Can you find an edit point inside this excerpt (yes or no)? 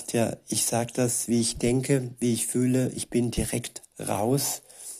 no